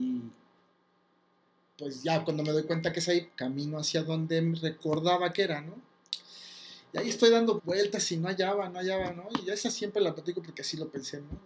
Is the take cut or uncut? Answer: cut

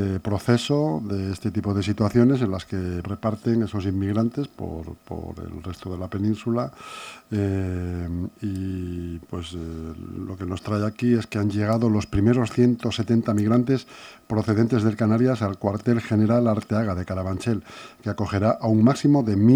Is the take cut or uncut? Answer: cut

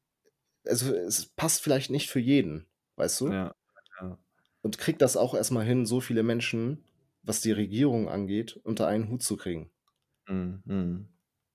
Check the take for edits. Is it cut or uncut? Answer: uncut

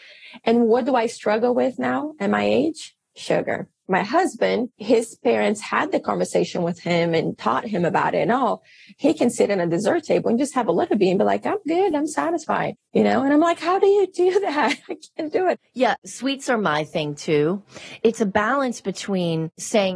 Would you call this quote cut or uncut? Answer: uncut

